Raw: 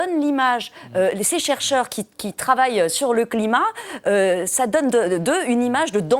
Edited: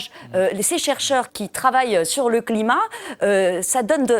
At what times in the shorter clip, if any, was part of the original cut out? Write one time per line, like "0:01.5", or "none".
0:01.3